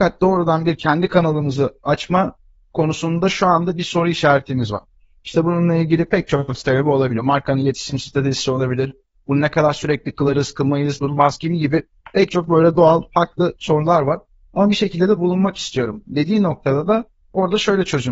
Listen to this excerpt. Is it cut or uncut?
cut